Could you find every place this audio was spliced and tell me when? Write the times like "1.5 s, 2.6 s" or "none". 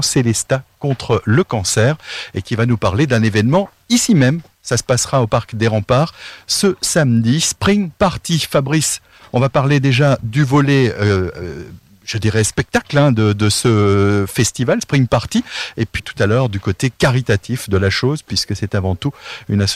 16.0 s